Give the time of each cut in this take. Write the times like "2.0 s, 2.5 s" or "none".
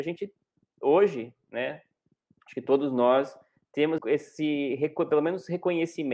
4.0 s